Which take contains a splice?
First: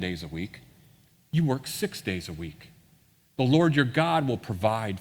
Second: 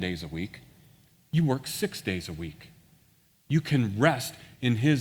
second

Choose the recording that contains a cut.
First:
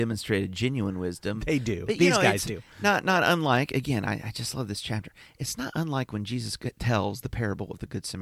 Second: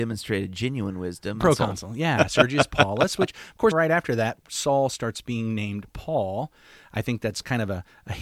second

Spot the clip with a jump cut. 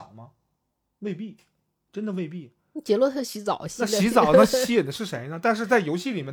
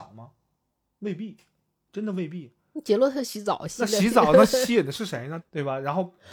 second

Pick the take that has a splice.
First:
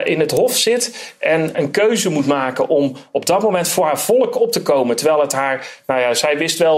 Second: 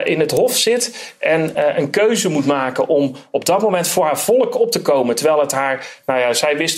first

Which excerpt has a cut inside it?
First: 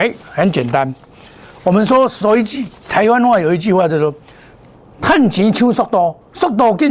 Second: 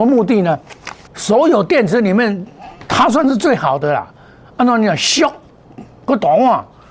second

